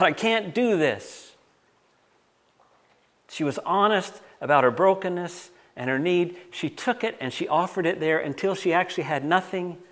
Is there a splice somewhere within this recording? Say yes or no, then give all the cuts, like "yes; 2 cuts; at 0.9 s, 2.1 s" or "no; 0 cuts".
no; 0 cuts